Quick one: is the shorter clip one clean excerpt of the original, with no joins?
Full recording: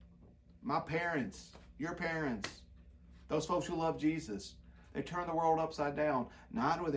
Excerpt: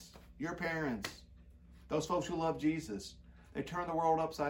yes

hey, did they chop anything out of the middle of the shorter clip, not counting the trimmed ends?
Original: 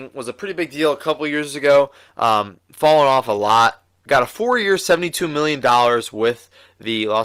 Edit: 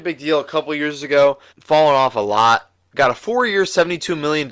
yes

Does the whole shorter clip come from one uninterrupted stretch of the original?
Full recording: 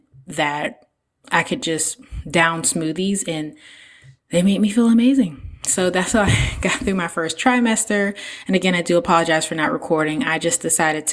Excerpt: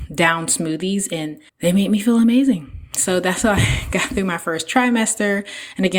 no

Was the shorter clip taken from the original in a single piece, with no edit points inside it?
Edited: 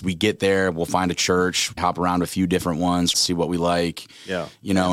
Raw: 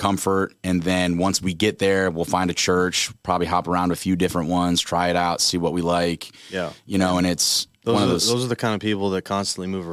no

